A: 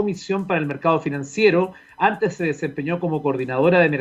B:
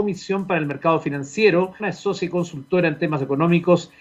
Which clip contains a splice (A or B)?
B